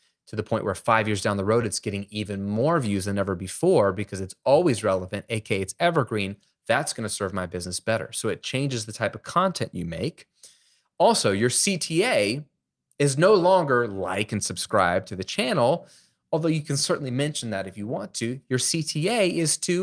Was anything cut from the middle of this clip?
no; 0 cuts

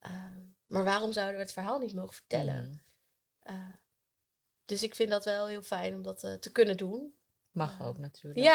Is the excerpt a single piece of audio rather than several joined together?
no; 1 cut; at 7.4 s

